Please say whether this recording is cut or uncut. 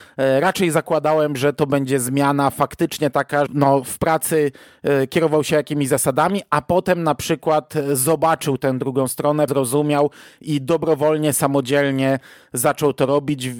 cut